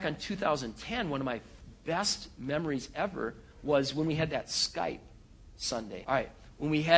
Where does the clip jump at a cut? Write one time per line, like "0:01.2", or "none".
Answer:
0:06.0